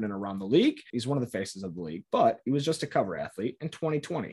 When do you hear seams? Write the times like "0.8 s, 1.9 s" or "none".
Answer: 0.9 s